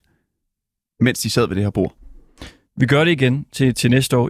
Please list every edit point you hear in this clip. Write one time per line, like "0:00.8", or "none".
0:02.7